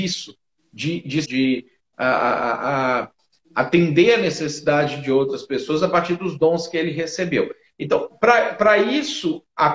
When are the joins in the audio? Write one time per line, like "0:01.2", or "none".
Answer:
0:01.2